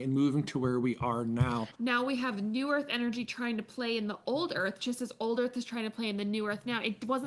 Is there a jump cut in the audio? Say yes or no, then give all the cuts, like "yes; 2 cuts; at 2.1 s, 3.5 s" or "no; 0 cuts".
yes; 1 cut; at 1.7 s